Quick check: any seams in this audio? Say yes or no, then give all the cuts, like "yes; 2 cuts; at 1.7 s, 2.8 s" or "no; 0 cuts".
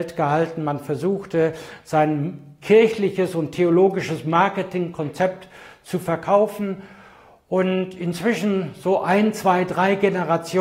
no; 0 cuts